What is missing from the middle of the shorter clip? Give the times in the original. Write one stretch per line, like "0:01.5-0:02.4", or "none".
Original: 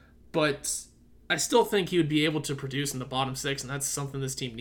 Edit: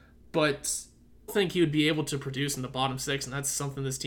0:01.3-0:01.6